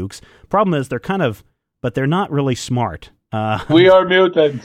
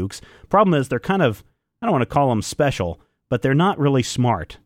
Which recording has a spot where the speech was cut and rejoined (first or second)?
first